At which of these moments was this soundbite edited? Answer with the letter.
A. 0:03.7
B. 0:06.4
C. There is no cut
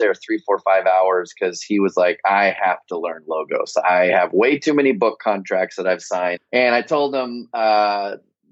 B